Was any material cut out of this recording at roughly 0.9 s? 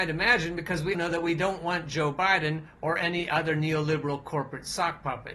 yes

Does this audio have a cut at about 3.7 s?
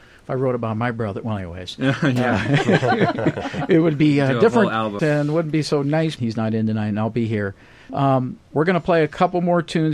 no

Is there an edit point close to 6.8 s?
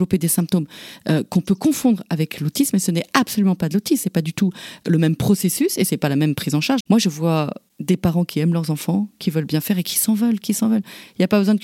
yes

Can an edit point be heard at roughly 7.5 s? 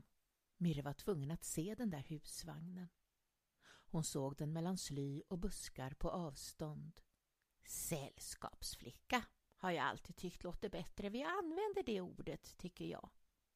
yes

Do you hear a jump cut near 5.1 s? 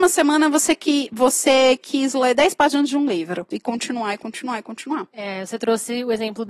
no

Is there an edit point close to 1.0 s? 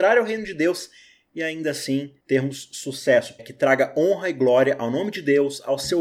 no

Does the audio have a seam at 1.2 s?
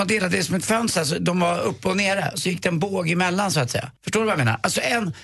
no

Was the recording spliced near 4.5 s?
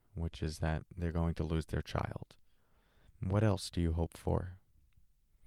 no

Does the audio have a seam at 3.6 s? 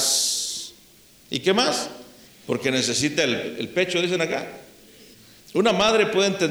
no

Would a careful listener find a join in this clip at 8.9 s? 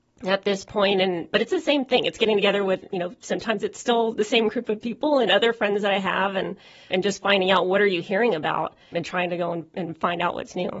yes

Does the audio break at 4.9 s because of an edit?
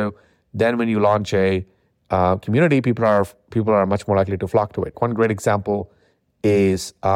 yes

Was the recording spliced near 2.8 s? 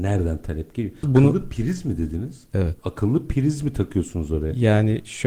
no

